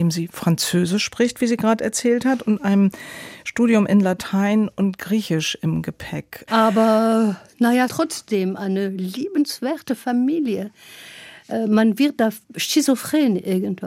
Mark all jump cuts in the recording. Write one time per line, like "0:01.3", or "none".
0:06.5
0:07.9

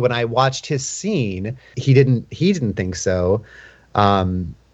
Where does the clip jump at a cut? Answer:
0:01.7

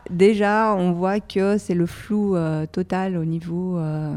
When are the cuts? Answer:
none

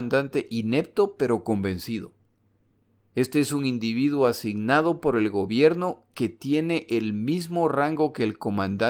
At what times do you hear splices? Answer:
0:03.1

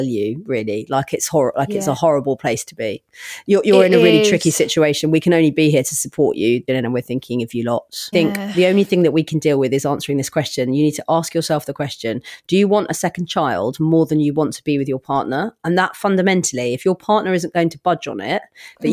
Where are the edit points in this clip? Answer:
0:06.7
0:08.1

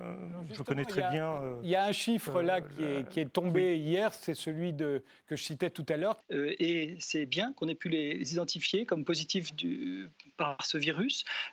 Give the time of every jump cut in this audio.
0:06.2

